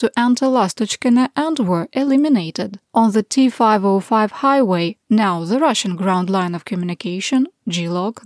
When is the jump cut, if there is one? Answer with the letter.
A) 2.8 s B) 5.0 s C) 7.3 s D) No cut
A